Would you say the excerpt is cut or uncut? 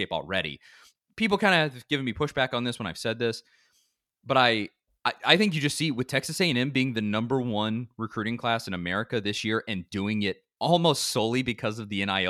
uncut